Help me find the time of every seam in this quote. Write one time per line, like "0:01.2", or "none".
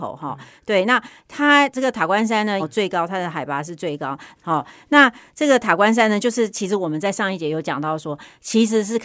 0:02.6
0:04.3